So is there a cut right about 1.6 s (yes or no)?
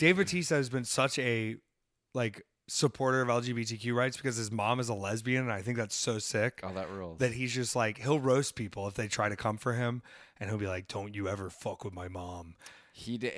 no